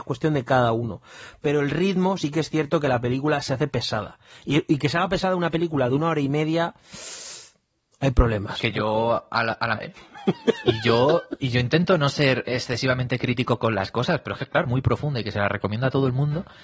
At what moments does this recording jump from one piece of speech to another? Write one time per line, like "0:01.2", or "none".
0:09.8
0:14.6